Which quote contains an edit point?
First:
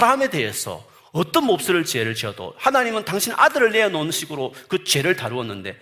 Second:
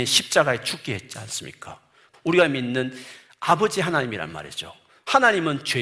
second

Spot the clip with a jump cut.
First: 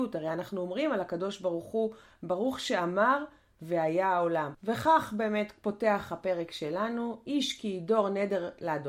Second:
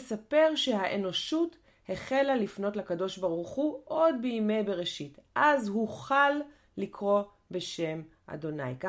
first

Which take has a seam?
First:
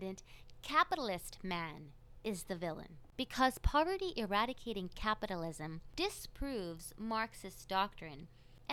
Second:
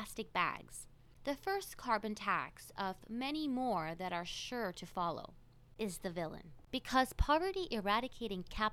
second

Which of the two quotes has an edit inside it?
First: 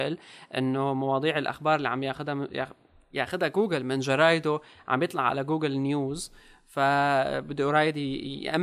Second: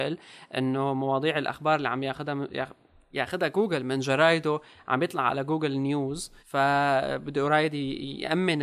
second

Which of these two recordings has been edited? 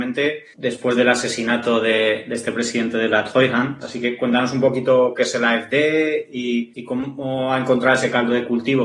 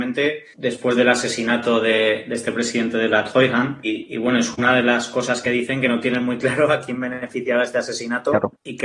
first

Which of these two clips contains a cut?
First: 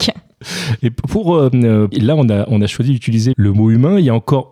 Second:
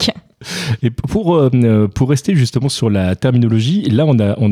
first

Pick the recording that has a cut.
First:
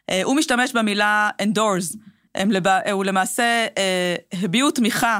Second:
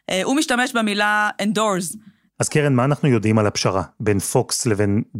second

